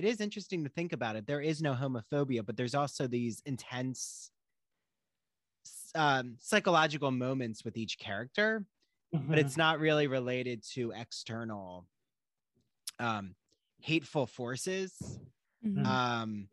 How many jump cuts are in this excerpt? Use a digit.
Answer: 0